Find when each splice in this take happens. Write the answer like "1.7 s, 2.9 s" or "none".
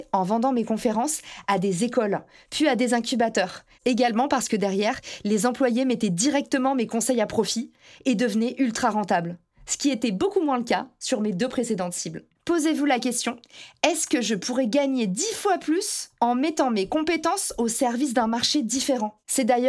3.8 s, 12.3 s

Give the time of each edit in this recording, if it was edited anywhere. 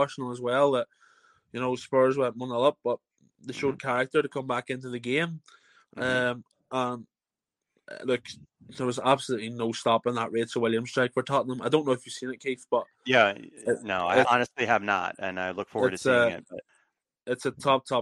14.2 s

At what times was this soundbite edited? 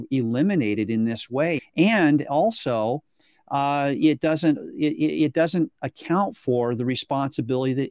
1.6 s

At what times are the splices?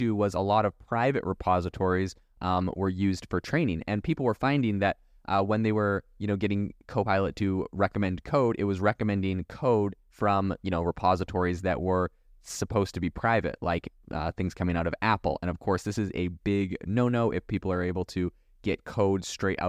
none

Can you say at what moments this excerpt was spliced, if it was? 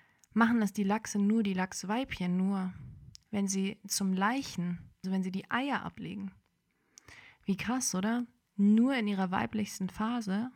5.0 s

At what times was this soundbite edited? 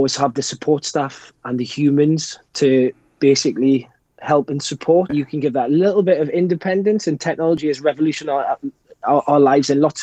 5.1 s

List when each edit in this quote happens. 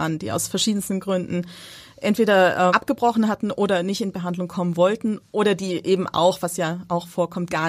2.7 s

